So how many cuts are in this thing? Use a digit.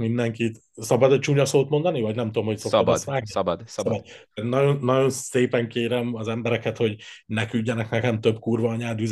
0